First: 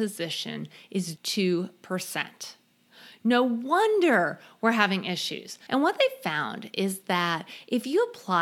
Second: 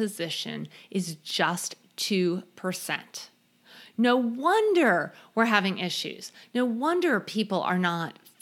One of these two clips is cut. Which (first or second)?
first